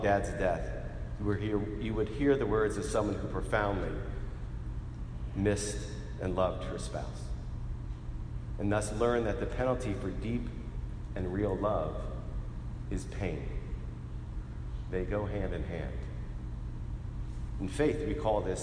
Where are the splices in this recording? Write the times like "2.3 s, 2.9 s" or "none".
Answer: none